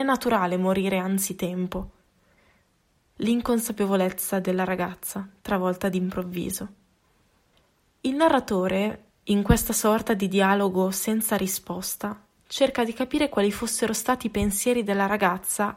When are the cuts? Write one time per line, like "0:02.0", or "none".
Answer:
none